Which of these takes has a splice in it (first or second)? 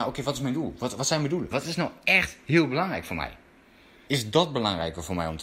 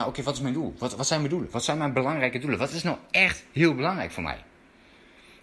first